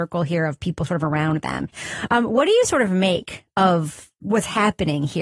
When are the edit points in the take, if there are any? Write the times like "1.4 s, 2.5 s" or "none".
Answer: none